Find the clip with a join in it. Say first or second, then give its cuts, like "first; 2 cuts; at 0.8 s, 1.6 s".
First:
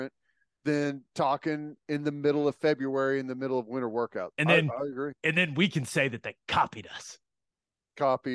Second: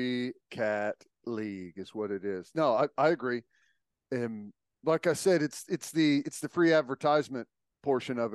first; 1 cut; at 4.3 s